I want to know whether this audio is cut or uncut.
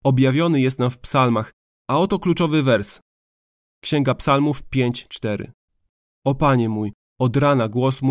uncut